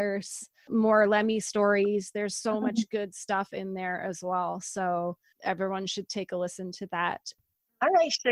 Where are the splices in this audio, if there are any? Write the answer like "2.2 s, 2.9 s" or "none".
none